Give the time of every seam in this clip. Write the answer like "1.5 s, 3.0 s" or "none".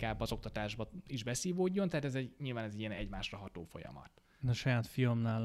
4.4 s